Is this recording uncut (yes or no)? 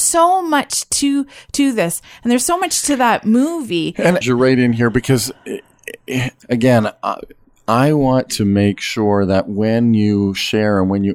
no